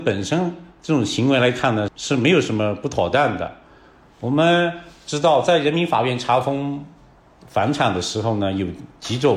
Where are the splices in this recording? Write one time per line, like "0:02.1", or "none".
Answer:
0:01.9